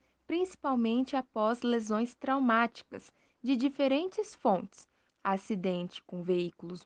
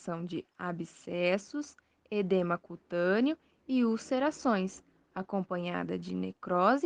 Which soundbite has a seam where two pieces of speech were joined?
first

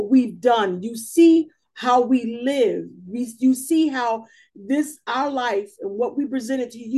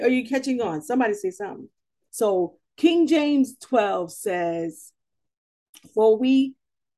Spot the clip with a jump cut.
second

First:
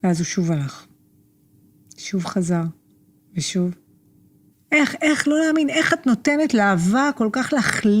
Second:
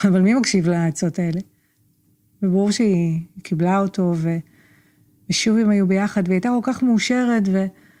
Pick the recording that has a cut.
first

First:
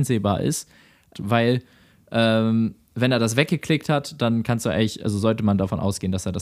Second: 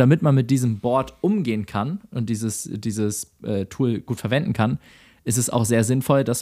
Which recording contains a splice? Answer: first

